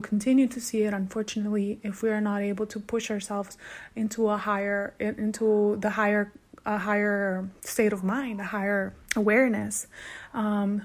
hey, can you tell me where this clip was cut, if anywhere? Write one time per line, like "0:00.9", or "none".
0:09.0